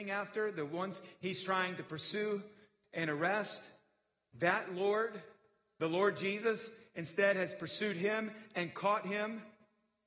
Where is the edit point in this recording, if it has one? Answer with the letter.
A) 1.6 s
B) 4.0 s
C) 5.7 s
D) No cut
D